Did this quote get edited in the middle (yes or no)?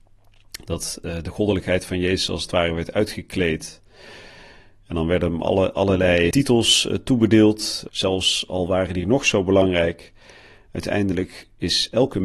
yes